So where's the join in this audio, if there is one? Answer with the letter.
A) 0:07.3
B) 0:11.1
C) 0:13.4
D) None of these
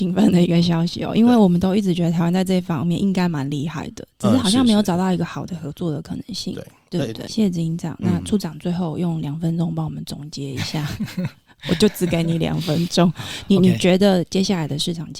A